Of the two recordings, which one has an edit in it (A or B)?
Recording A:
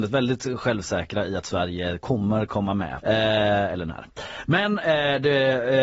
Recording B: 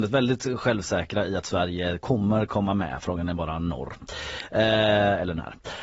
A